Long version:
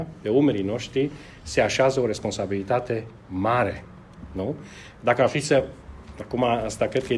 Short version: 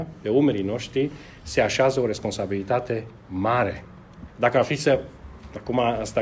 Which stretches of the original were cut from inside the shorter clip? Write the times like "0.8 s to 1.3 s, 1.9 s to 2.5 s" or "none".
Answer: 4.3 s to 4.9 s